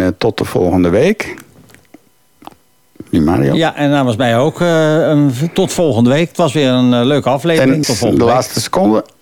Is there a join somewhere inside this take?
yes; 1 cut; at 7.8 s

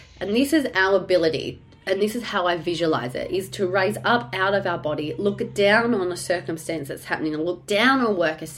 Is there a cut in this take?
no; 0 cuts

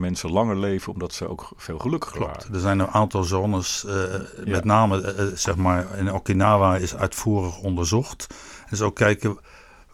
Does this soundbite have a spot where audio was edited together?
no; 0 cuts

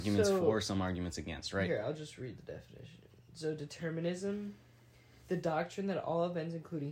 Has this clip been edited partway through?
no; 0 cuts

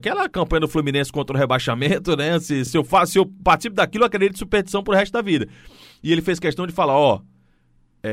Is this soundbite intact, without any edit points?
yes; 0 cuts

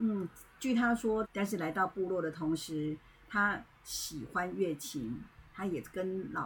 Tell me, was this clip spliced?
yes; 1 cut; at 1.2 s

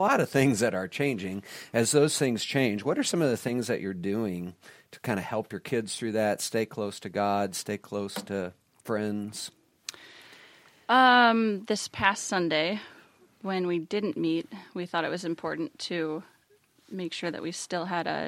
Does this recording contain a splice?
no; 0 cuts

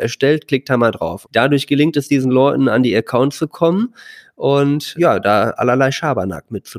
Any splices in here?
yes; 2 cuts; at 1.2 s, 5.0 s

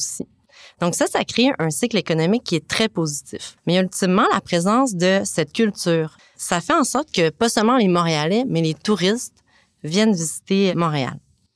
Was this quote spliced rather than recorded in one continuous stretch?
yes; 2 cuts; at 3.6 s, 6.2 s

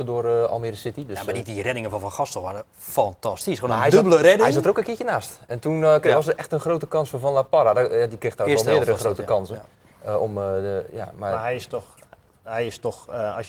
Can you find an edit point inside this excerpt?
no; 0 cuts

